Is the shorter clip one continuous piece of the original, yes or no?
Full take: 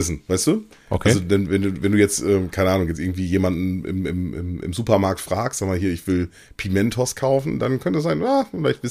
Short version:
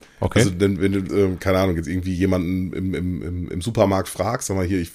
no